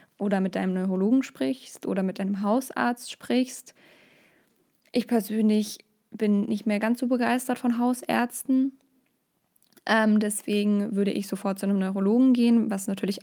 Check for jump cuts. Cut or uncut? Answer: uncut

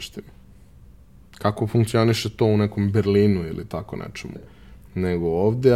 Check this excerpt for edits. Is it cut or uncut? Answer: cut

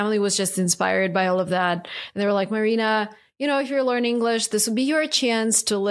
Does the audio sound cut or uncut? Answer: uncut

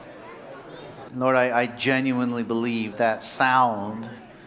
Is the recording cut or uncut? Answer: cut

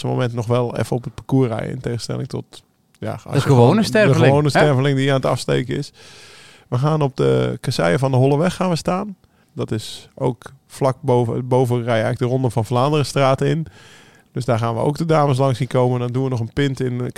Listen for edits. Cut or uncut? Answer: cut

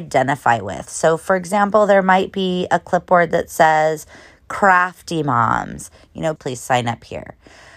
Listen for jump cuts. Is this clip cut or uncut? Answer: cut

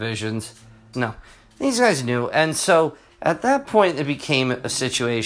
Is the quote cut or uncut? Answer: cut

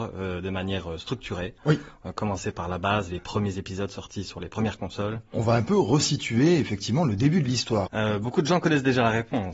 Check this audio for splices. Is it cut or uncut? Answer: cut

